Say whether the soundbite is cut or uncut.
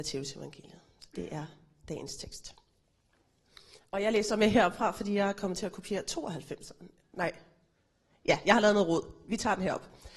uncut